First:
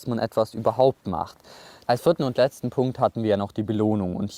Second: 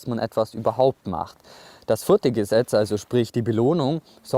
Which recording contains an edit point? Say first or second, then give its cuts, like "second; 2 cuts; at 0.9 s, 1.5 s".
first; 1 cut; at 1.8 s